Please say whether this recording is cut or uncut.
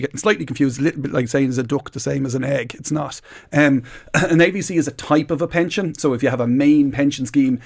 uncut